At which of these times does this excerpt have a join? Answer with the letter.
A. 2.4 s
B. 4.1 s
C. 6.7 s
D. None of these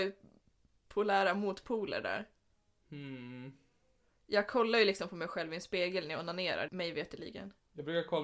C